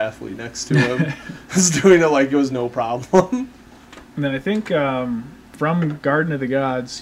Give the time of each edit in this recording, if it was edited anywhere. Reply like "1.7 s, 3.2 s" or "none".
5.5 s